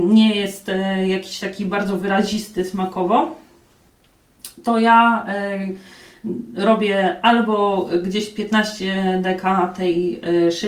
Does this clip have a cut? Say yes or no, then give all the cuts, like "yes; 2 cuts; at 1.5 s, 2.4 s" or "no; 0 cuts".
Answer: no; 0 cuts